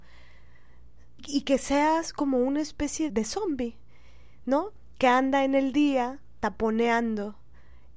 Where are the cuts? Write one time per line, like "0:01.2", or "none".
0:01.2
0:03.1